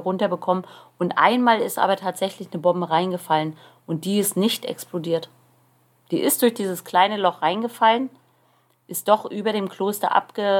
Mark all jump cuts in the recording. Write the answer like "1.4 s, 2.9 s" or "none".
none